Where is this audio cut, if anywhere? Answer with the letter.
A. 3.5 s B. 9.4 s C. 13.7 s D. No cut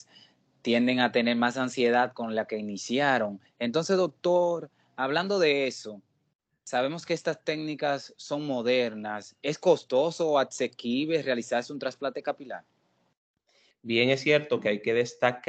C